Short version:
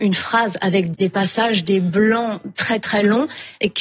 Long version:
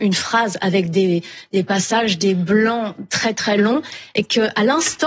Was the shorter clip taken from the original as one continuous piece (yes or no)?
no